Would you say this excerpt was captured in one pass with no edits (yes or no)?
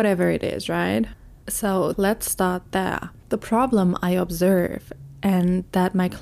no